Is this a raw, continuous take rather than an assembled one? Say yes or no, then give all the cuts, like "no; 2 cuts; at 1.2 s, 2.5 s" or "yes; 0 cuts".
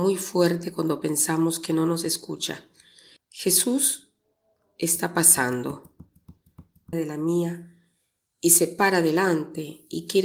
no; 2 cuts; at 3.2 s, 6.9 s